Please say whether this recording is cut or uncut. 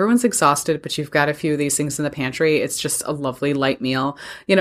uncut